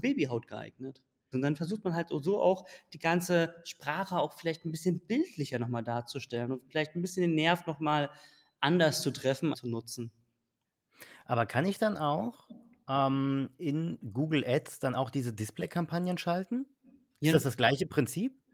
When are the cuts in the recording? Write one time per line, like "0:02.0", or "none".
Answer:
0:01.3
0:09.5